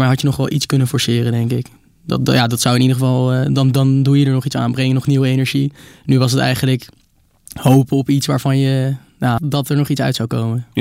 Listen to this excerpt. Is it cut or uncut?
cut